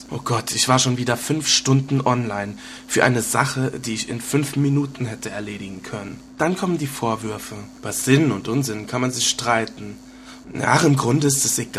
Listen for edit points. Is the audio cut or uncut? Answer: cut